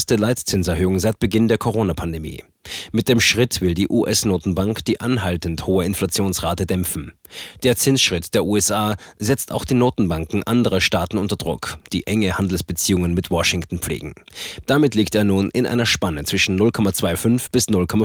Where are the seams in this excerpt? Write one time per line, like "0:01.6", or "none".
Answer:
0:14.6